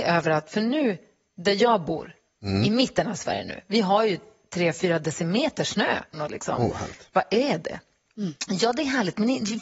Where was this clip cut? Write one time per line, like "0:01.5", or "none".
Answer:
0:06.1